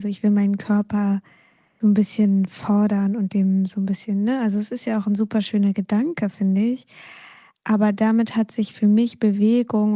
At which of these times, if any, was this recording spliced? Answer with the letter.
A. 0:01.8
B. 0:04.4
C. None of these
A